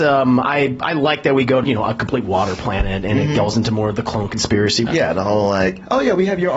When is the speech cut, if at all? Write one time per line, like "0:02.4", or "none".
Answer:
0:01.6
0:04.9